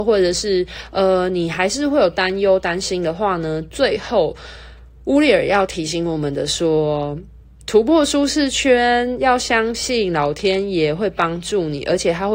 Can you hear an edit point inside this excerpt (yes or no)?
no